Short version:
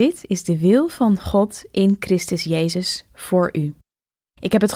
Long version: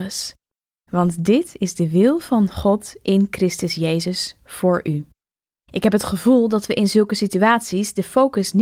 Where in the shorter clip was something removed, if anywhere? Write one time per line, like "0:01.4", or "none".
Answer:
none